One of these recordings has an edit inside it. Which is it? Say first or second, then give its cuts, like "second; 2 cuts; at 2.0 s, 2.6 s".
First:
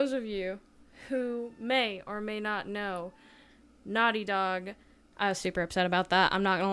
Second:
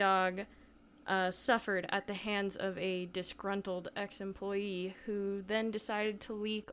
first; 1 cut; at 5.1 s